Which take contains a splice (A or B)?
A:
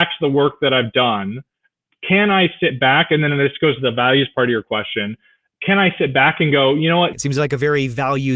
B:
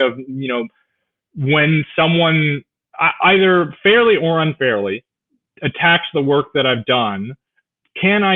A